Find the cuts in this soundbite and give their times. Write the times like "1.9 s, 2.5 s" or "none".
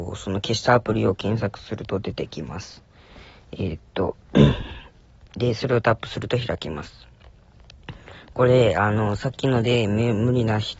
none